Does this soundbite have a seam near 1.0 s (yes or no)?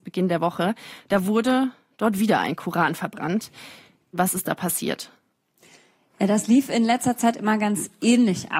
no